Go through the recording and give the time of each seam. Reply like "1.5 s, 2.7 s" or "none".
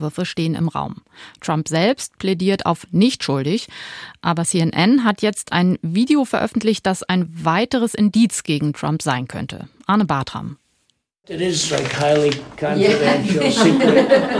none